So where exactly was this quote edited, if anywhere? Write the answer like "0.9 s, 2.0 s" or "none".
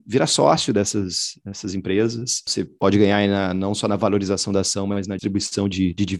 5.2 s